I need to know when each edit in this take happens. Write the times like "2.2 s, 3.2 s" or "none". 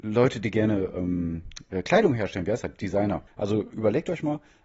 3.3 s